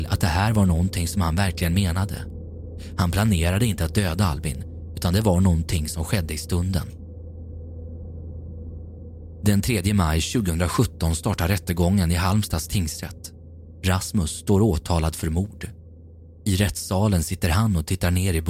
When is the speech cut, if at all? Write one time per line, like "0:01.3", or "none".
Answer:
none